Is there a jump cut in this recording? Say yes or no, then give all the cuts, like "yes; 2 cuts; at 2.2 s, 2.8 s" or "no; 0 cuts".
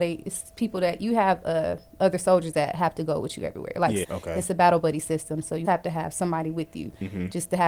yes; 2 cuts; at 4.0 s, 5.6 s